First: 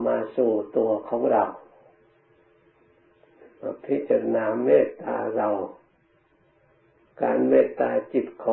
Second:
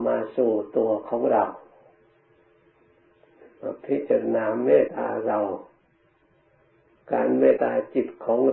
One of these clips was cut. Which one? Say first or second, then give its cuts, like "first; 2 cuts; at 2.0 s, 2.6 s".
second; 2 cuts; at 4.9 s, 7.6 s